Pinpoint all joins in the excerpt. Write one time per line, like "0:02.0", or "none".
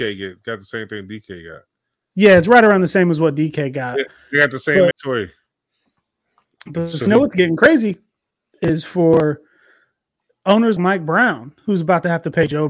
0:04.9
0:10.8

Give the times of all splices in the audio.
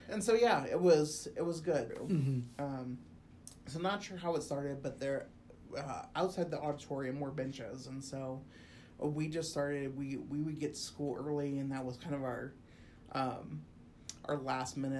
0:01.9

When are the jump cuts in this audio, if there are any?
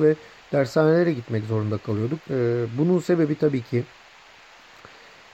0:02.2

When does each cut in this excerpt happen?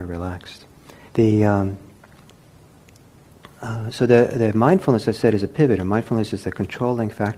0:01.1

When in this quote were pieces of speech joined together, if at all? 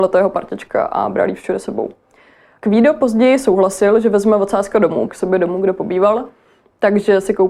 0:05.1

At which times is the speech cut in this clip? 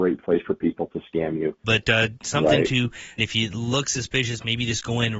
0:01.6
0:03.2

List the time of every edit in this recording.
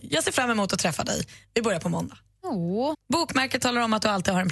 0:02.9

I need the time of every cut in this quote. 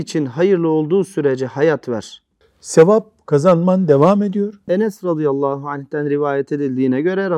0:02.4
0:04.7

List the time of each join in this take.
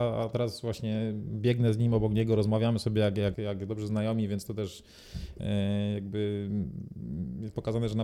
0:03.3

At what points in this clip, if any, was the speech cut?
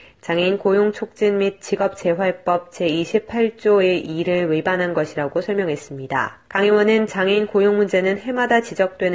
0:06.4

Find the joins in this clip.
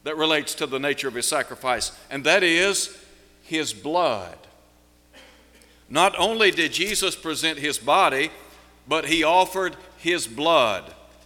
none

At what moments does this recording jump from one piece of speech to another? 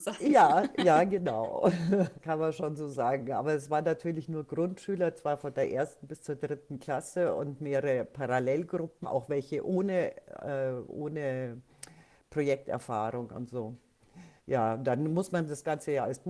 0:09.0
0:14.4

